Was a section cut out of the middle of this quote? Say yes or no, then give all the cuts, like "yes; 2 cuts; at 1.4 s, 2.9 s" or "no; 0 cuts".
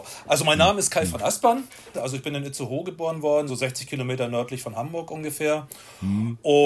yes; 2 cuts; at 1.9 s, 3.5 s